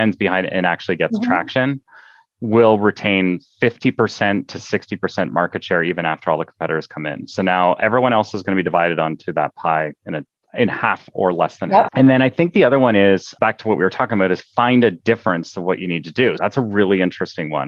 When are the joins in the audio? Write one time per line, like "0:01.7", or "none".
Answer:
0:11.9
0:16.4